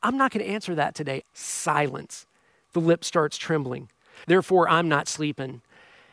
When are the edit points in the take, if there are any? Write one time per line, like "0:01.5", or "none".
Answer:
0:01.2
0:04.2